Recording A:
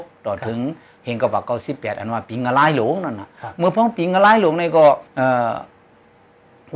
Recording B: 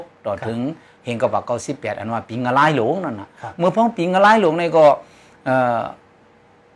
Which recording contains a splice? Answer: A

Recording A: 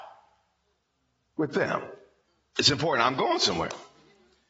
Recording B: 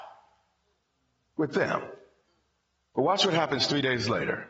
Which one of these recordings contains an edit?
A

